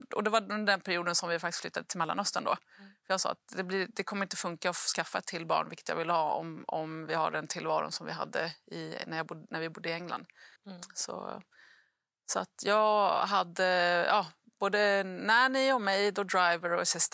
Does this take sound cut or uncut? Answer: cut